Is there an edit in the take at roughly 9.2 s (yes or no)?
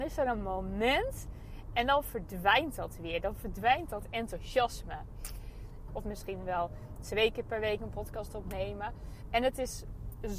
yes